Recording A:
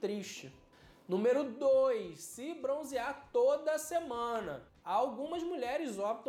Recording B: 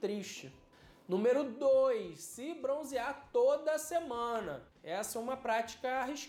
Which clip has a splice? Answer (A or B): B